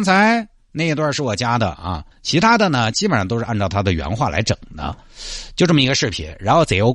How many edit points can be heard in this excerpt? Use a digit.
1